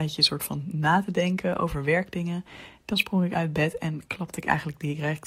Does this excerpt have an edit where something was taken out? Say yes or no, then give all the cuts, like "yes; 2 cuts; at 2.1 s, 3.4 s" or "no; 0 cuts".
no; 0 cuts